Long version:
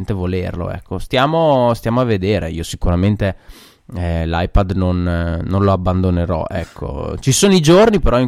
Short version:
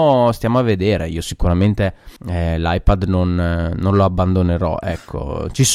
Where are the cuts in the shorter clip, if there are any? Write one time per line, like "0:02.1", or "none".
0:02.2